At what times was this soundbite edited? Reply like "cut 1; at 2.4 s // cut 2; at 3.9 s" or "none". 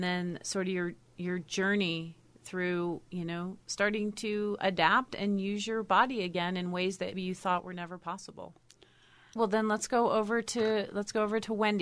cut 1; at 7.1 s // cut 2; at 9.4 s

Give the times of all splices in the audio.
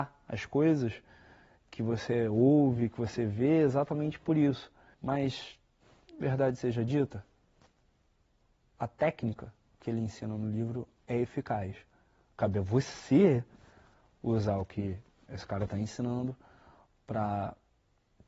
cut 1; at 4.9 s

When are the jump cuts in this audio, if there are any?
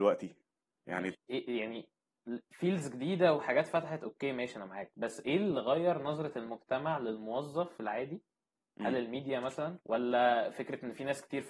cut 1; at 1.1 s // cut 2; at 9.8 s

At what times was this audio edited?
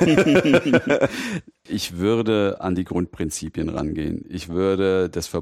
cut 1; at 1.7 s

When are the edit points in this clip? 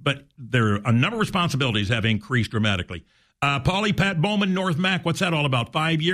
none

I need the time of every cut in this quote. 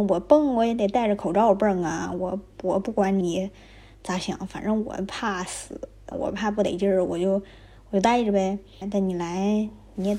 cut 1; at 3.2 s // cut 2; at 6.1 s // cut 3; at 8.8 s

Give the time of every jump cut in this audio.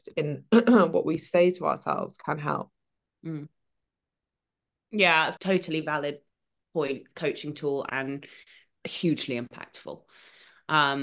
cut 1; at 3.1 s // cut 2; at 5.4 s

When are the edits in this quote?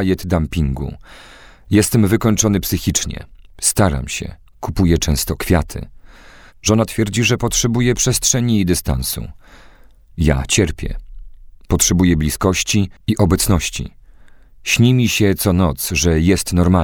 cut 1; at 13.0 s

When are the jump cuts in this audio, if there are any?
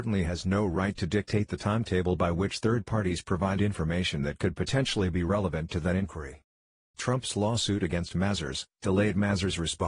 cut 1; at 6.9 s // cut 2; at 8.7 s

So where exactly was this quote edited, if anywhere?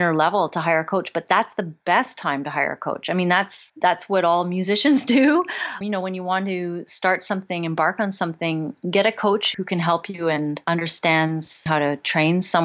none

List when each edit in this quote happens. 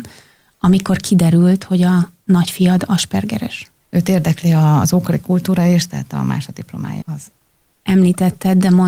cut 1; at 3.8 s // cut 2; at 7.0 s

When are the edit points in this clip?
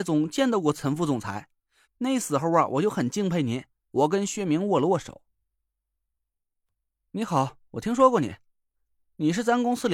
cut 1; at 1.8 s // cut 2; at 3.8 s

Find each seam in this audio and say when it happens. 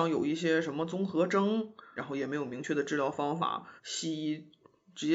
cut 1; at 2.0 s // cut 2; at 3.8 s

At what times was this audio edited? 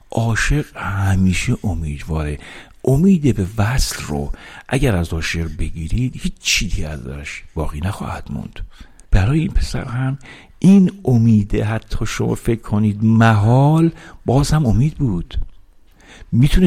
cut 1; at 9.1 s

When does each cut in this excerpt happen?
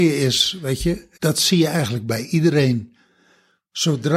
cut 1; at 1.1 s

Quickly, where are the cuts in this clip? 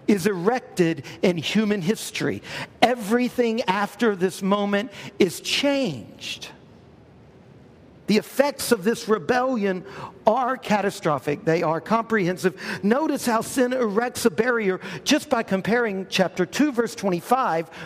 none

